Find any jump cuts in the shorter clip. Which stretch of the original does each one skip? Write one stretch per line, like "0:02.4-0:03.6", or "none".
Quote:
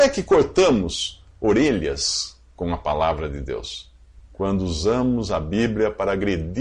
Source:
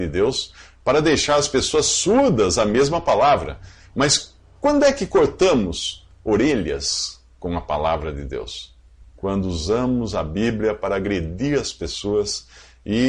none